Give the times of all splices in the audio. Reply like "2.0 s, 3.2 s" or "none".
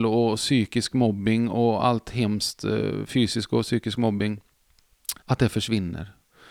5.2 s